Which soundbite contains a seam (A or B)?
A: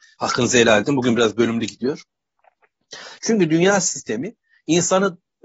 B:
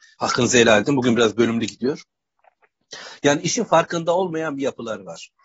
A